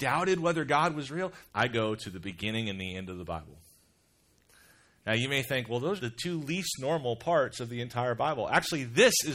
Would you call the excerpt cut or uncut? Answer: cut